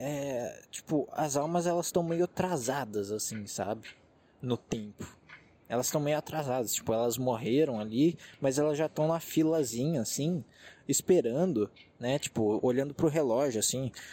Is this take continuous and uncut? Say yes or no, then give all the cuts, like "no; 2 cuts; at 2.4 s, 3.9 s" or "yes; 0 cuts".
yes; 0 cuts